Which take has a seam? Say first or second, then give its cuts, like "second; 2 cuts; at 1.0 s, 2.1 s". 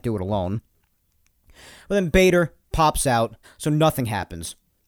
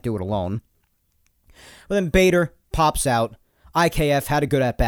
first; 1 cut; at 3.4 s